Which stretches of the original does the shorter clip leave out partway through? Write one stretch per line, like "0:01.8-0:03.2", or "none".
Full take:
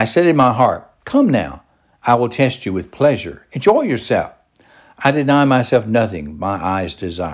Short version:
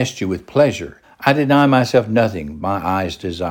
0:03.5-0:04.8